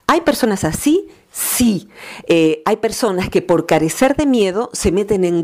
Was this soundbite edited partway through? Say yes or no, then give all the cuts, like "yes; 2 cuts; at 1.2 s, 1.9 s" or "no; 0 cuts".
no; 0 cuts